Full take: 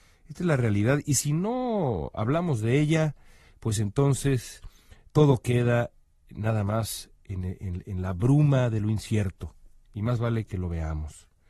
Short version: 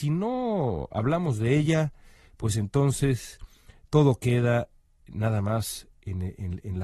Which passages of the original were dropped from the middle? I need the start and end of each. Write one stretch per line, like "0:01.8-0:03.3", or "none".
none